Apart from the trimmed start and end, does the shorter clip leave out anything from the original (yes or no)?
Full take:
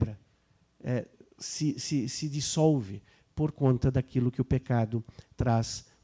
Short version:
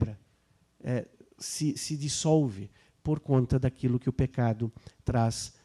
yes